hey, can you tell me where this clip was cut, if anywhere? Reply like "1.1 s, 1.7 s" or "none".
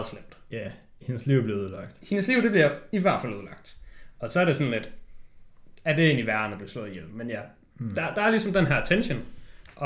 none